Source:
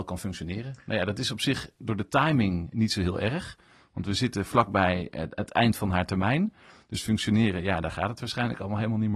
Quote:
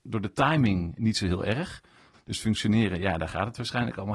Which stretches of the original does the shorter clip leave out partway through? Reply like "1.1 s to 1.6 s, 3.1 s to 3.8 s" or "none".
3.9 s to 6.8 s

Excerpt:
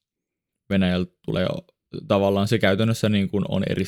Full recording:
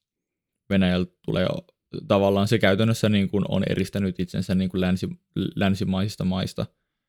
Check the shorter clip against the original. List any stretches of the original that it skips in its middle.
none

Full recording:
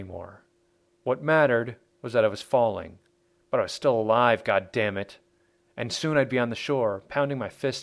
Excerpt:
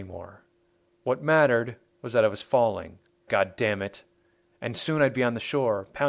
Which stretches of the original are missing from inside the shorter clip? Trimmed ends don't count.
3.3 s to 4.4 s

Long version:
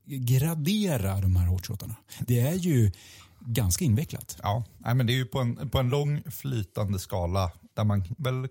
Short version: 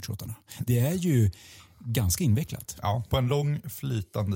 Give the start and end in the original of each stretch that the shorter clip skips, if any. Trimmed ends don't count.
4.7 s to 5.7 s

